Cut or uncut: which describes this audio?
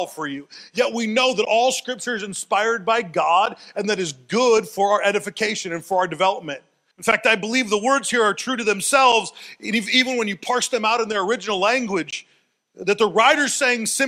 cut